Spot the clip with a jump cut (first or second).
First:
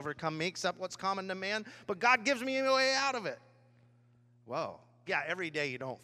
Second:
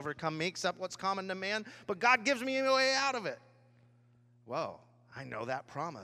first